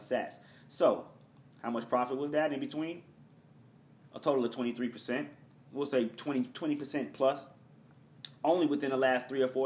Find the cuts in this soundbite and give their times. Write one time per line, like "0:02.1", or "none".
none